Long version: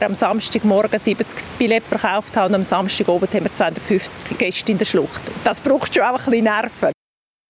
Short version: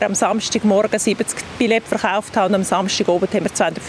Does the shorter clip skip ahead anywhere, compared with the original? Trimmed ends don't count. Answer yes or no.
no